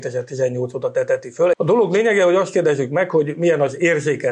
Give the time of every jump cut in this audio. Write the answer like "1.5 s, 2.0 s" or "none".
1.5 s